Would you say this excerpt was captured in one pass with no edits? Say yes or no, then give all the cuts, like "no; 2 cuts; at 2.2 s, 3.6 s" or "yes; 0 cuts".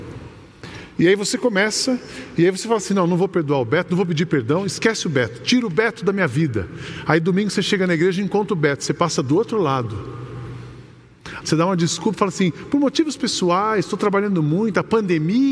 no; 1 cut; at 11.4 s